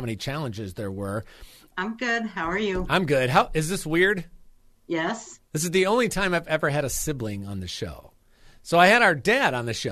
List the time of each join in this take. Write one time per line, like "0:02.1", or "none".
0:01.7